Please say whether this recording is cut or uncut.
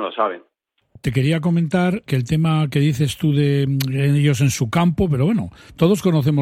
cut